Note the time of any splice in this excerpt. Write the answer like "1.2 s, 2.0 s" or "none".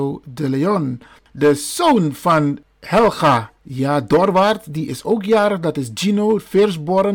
3.6 s